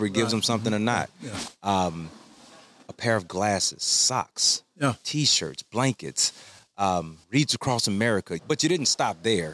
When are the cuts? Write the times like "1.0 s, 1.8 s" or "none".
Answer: 7.2 s, 8.4 s